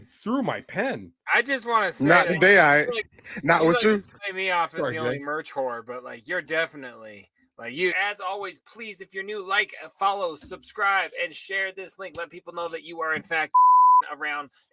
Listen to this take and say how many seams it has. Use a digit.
1